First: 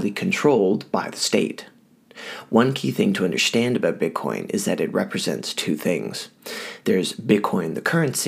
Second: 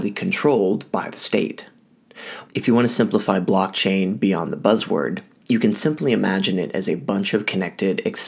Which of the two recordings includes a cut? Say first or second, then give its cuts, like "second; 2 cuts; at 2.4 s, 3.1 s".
second; 1 cut; at 2.5 s